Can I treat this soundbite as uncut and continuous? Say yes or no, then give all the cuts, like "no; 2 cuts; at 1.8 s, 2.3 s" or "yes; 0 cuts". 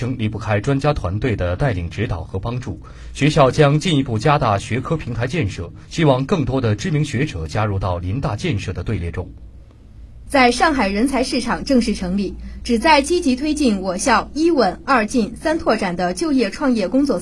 no; 1 cut; at 10.3 s